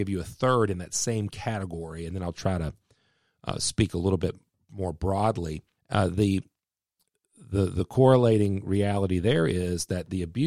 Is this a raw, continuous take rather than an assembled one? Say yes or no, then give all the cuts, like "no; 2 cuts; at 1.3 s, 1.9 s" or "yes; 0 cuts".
no; 1 cut; at 5.8 s